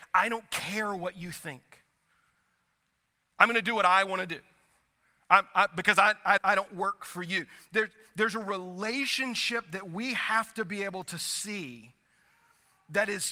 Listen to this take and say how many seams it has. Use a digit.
1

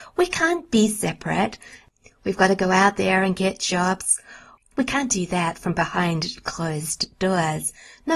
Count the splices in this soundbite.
1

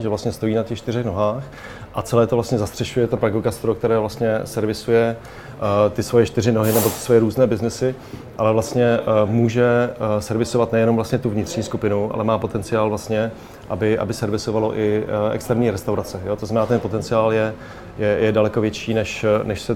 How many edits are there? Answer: 0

